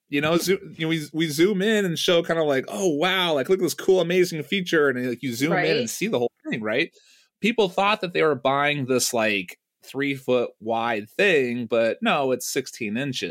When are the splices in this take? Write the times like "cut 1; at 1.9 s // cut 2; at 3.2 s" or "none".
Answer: none